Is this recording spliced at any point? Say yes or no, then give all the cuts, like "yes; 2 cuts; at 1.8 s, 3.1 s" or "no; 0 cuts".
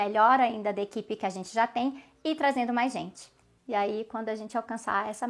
yes; 1 cut; at 3.6 s